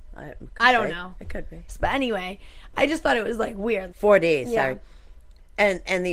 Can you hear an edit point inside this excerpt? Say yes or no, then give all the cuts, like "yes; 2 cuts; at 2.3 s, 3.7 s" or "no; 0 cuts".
yes; 2 cuts; at 1.7 s, 3.9 s